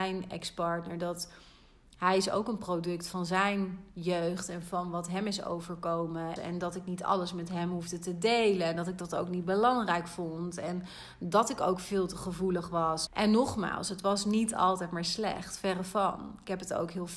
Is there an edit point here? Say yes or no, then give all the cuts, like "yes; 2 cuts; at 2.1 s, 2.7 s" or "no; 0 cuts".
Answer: yes; 2 cuts; at 6.4 s, 13.1 s